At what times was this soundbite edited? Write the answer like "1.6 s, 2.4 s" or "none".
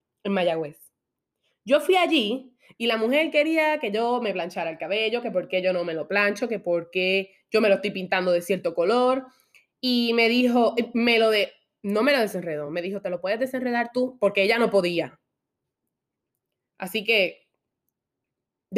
none